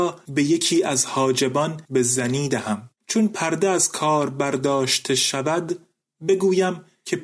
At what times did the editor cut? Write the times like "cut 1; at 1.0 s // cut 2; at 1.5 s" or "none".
cut 1; at 3.0 s